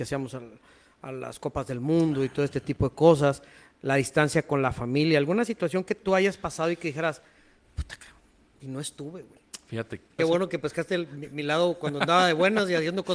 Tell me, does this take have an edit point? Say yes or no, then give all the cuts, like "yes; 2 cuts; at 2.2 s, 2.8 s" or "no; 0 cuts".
yes; 1 cut; at 10.2 s